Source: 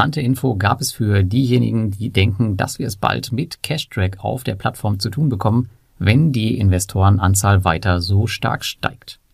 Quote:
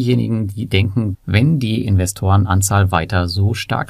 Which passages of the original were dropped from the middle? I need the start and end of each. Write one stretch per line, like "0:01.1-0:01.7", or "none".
0:02.6-0:05.9

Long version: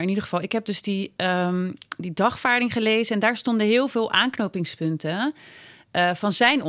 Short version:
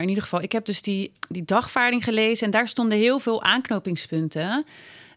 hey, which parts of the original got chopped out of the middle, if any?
0:01.1-0:01.8

